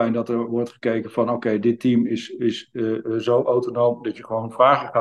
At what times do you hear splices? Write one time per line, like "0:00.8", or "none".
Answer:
none